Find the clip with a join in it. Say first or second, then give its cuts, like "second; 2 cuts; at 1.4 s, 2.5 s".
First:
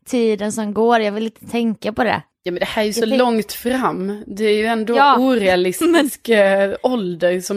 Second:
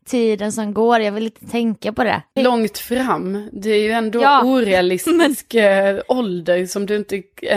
second; 1 cut; at 2.4 s